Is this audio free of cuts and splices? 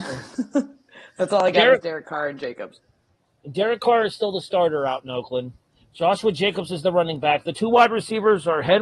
yes; 0 cuts

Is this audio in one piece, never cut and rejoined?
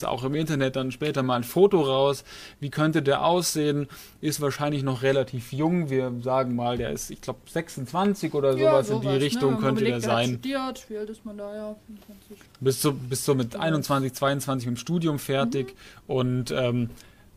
yes; 0 cuts

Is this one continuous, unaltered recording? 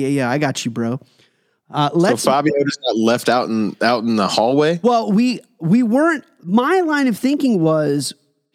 yes; 0 cuts

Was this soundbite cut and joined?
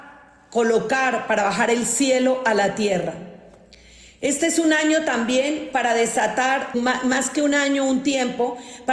yes; 1 cut; at 6.7 s

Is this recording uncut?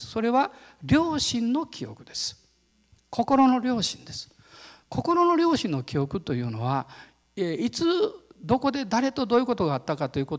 yes; 0 cuts

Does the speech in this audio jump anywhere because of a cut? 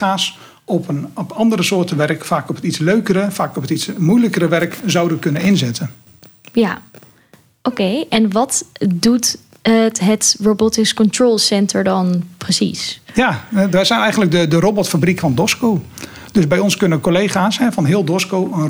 no; 0 cuts

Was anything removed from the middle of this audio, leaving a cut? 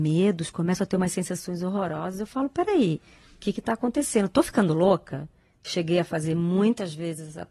no; 0 cuts

